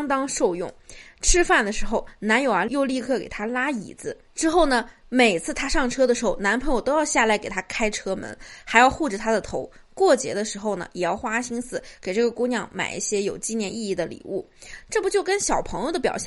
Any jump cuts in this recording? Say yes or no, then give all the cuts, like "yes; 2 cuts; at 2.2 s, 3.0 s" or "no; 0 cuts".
no; 0 cuts